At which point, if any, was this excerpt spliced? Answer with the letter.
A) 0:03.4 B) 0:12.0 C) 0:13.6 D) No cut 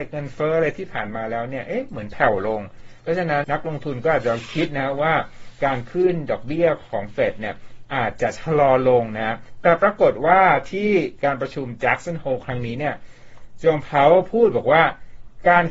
A